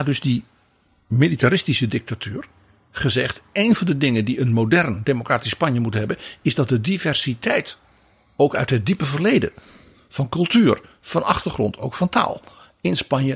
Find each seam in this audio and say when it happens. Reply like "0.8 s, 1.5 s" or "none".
none